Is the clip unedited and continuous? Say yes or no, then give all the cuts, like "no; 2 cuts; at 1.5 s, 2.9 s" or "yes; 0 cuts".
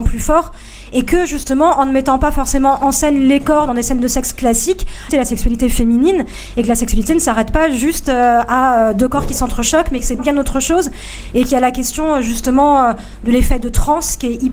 no; 2 cuts; at 5.1 s, 10.2 s